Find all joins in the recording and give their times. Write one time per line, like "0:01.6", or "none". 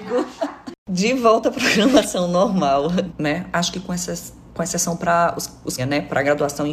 0:03.1
0:05.8